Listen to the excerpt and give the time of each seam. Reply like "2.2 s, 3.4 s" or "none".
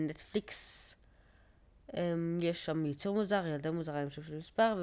none